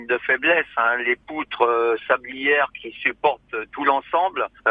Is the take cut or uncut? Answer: uncut